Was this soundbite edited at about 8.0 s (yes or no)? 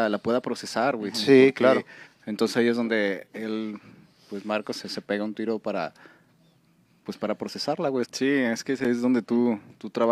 yes